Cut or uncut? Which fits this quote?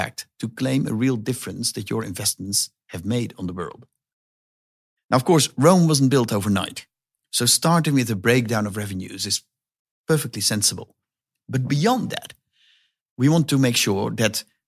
uncut